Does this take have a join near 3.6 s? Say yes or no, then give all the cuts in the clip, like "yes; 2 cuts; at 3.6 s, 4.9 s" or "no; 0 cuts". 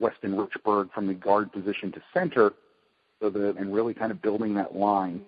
yes; 1 cut; at 3.6 s